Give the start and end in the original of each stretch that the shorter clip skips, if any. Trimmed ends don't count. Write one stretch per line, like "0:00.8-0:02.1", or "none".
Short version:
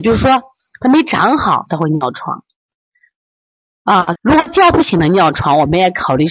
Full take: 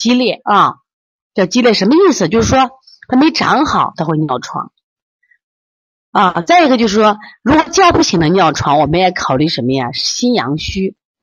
0:06.4-0:07.4